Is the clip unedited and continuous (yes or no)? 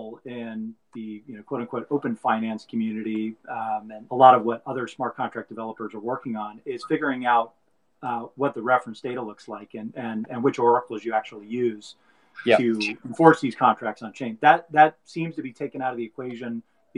no